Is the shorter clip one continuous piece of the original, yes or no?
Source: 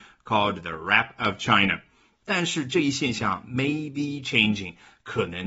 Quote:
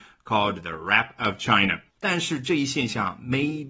no